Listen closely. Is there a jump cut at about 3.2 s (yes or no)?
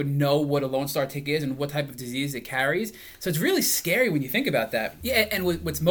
no